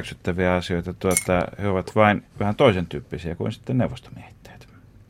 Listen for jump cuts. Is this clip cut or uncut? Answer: cut